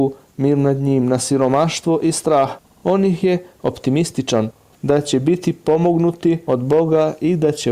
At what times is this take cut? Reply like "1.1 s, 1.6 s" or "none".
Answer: 4.7 s